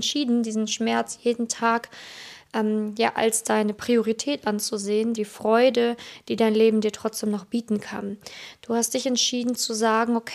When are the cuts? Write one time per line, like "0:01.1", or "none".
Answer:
0:05.2